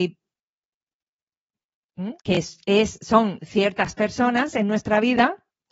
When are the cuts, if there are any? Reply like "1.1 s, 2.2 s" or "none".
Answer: 2.2 s